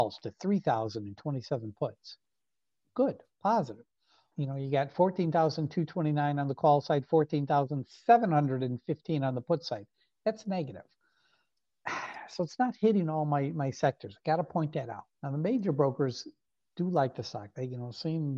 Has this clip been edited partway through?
yes; 2 cuts; at 4.3 s, 15.1 s

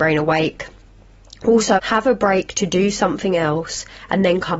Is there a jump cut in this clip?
yes; 1 cut; at 1.8 s

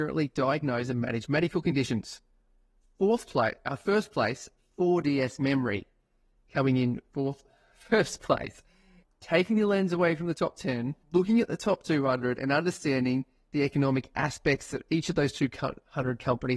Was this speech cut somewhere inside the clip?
yes; 2 cuts; at 9.0 s, 11.0 s

